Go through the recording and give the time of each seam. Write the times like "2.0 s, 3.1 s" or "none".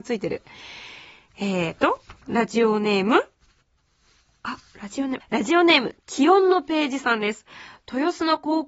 5.2 s